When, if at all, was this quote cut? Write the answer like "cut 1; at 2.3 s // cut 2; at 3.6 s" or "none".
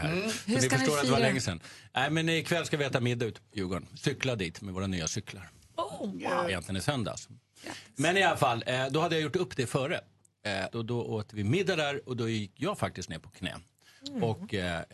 cut 1; at 6.5 s // cut 2; at 10.7 s